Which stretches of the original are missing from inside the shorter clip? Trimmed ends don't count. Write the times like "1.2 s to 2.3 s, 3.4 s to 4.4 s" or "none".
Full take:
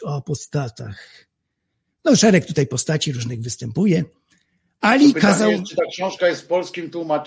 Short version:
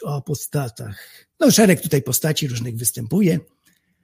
1.3 s to 1.9 s